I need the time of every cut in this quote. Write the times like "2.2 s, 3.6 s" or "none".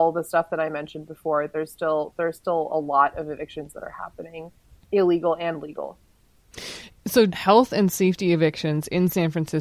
7.3 s